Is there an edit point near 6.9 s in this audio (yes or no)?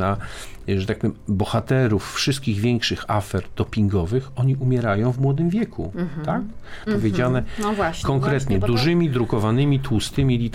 yes